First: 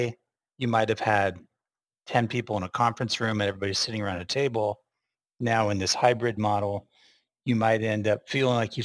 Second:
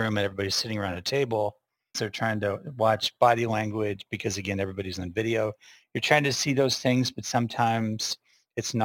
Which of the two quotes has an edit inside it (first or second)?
second